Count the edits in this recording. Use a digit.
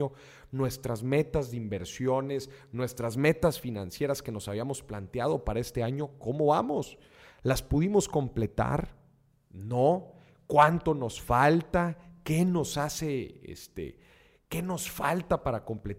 0